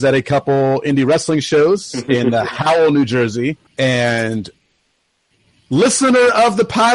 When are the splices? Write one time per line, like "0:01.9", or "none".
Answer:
0:03.7